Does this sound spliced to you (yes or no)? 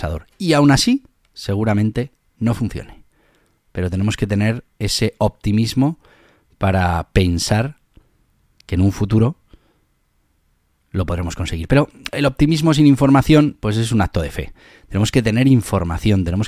no